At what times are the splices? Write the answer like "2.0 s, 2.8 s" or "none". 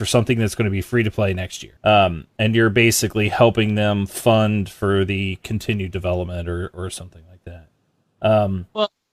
1.8 s